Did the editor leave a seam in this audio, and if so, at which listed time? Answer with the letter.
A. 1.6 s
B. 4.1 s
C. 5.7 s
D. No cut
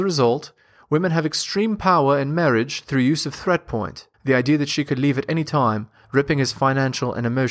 B